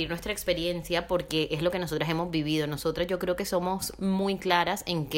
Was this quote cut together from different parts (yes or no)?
no